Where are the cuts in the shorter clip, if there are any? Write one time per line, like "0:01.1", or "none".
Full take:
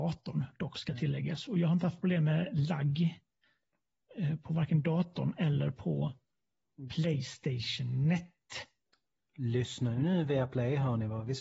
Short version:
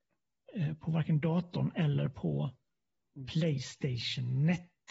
none